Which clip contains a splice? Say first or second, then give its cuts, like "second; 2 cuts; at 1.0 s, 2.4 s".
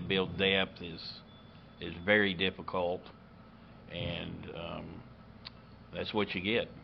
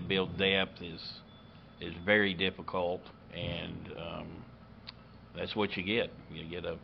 second; 1 cut; at 3.2 s